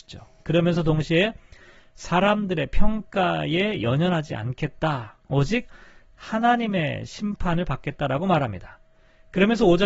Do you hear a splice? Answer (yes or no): no